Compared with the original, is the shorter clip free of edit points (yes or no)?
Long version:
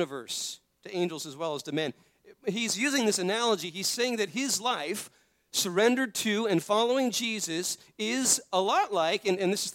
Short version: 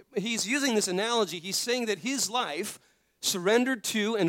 yes